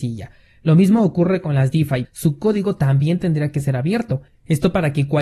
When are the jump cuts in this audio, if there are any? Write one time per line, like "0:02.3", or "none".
0:02.1